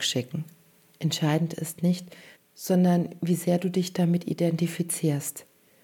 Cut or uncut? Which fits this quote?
cut